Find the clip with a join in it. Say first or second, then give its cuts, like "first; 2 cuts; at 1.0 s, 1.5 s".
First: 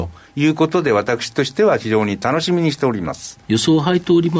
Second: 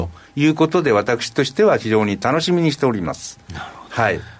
first; 1 cut; at 3.4 s